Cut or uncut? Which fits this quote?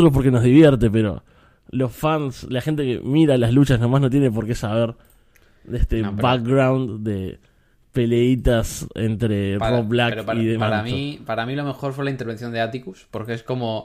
uncut